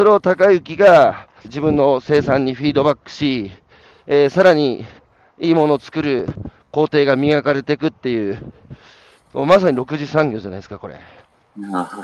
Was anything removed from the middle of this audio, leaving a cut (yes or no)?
yes